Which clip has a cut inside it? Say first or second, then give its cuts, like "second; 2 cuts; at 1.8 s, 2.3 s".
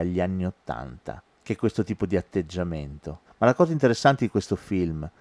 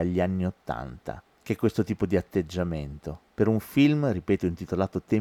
first; 1 cut; at 3.2 s